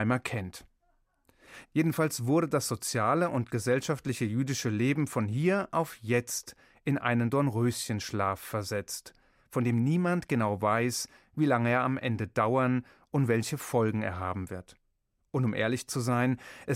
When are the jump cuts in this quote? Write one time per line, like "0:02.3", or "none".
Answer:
0:01.6